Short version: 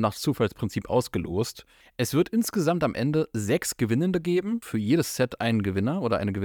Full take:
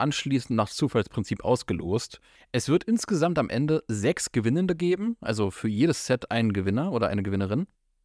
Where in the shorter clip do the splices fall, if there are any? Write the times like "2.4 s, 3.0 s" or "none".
4.6 s